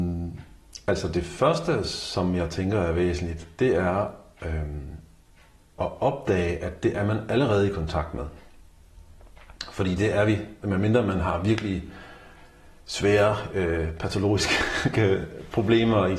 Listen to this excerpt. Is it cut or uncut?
uncut